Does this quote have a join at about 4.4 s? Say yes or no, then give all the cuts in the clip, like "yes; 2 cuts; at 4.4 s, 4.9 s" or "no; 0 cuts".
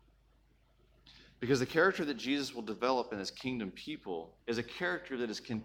yes; 1 cut; at 4.4 s